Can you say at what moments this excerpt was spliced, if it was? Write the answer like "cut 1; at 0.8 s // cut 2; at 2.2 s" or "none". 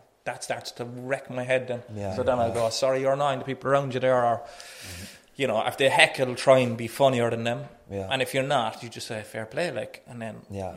none